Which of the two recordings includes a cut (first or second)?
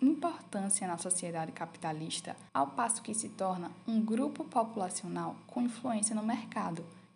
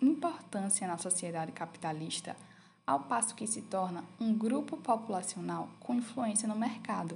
first